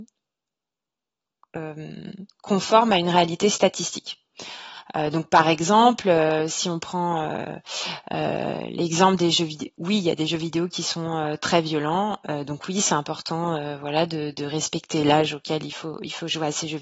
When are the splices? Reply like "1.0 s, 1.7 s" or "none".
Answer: none